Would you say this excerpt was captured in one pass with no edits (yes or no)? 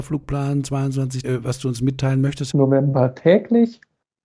no